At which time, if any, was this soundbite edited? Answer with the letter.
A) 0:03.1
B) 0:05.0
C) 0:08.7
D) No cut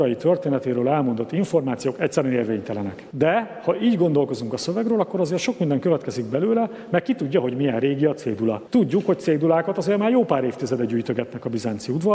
A